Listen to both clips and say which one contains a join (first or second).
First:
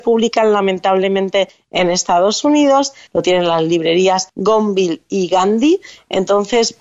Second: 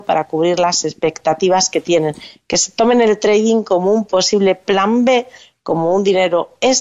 first